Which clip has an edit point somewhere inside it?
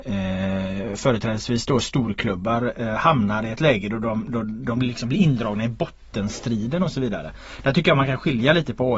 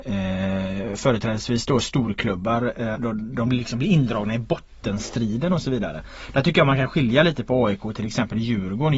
second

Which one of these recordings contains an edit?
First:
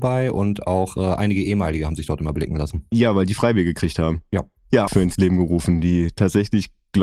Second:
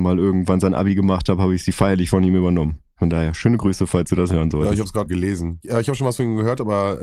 first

